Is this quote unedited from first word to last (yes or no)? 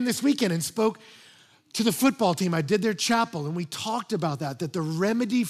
yes